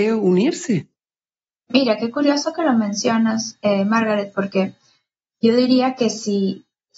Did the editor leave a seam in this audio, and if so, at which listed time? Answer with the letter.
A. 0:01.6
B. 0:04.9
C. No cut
C